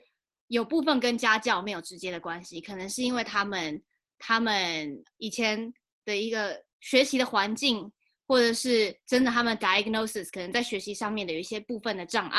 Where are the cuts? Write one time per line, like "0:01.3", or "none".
0:05.2
0:06.7